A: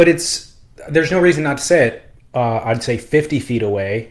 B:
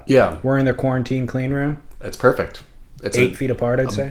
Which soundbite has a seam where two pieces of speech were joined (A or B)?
A